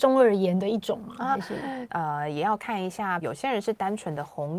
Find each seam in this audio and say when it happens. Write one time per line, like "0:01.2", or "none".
0:01.9
0:03.2